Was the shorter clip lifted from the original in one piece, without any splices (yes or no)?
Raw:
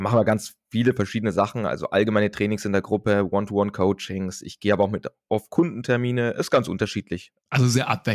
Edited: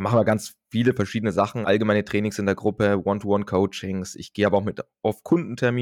no